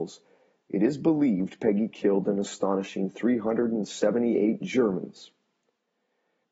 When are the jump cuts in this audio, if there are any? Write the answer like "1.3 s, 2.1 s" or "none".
none